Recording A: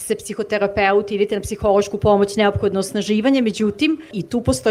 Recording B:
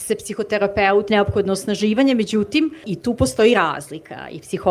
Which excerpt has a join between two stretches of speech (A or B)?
B